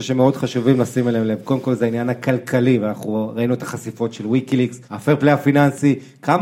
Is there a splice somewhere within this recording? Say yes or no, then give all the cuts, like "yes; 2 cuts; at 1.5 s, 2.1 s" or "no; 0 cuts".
yes; 1 cut; at 4.8 s